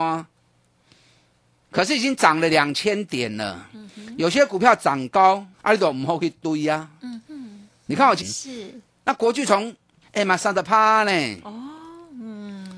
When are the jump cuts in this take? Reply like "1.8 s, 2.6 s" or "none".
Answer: 5.5 s, 8.2 s, 10.0 s